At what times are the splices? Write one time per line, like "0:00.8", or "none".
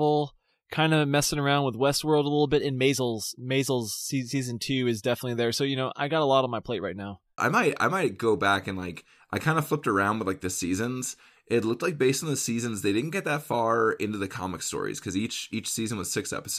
0:07.4